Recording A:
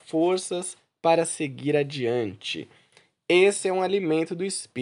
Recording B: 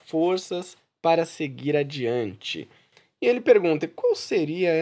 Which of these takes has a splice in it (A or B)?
B